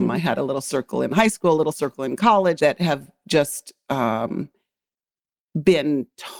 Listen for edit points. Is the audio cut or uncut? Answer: cut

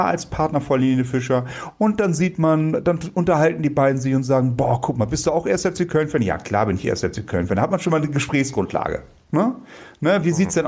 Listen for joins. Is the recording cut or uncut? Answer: uncut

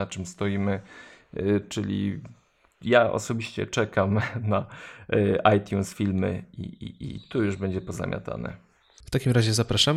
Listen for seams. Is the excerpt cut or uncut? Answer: cut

